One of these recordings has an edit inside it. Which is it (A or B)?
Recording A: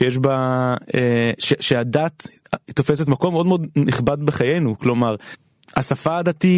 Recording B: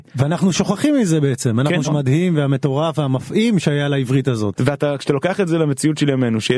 B